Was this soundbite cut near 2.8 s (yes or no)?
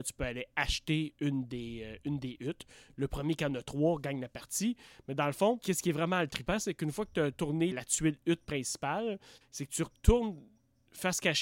no